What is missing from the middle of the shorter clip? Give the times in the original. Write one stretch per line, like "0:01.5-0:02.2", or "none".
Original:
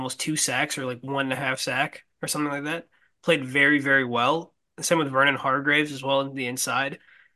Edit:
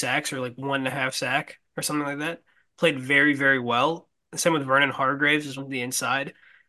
0:06.0-0:06.2